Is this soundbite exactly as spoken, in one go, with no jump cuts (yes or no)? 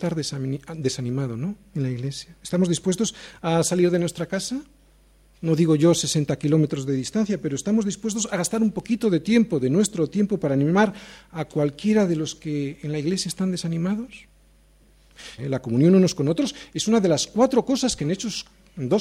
no